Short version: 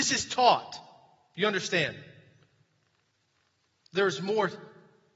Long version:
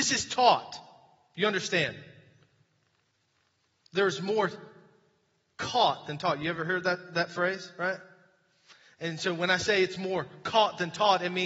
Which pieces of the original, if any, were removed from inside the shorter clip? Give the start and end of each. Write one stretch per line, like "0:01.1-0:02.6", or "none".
none